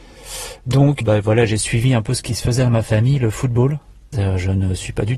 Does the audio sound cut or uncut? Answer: cut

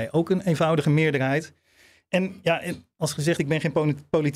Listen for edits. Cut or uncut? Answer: uncut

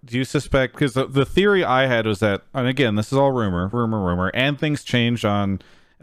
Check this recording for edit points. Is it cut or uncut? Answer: cut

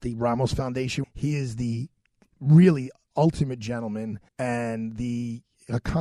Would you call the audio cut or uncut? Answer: cut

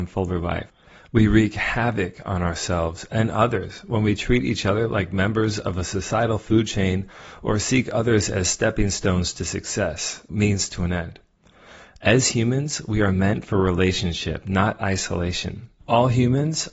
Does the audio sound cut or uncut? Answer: cut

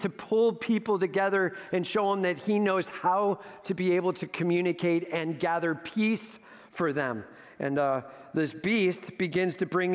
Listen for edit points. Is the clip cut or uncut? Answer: uncut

